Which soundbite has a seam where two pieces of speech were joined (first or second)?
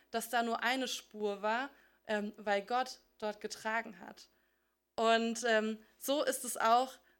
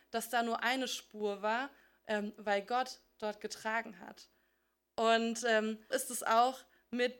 second